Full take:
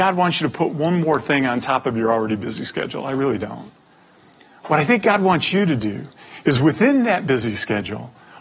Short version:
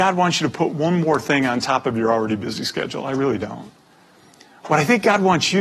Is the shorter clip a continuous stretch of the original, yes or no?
yes